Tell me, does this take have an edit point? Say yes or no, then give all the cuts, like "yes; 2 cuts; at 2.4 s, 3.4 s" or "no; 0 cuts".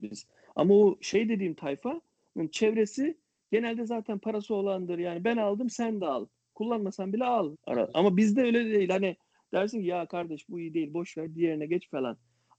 yes; 1 cut; at 7.5 s